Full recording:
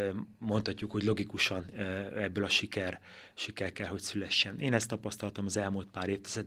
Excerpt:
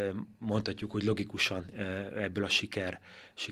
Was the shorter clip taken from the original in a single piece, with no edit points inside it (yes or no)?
yes